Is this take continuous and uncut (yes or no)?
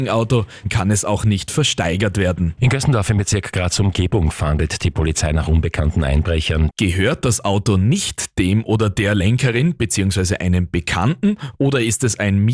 no